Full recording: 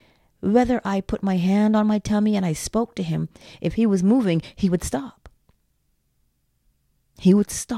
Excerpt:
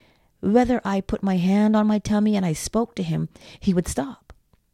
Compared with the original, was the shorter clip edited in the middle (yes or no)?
yes